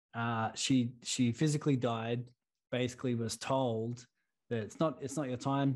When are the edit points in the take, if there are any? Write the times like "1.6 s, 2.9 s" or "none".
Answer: 2.6 s